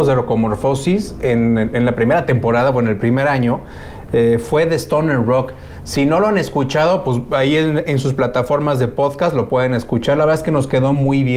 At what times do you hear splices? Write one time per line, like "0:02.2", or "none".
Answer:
none